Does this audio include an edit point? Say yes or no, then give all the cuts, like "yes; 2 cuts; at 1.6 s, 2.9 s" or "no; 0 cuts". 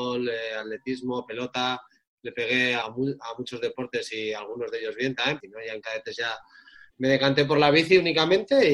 yes; 2 cuts; at 2.8 s, 5.4 s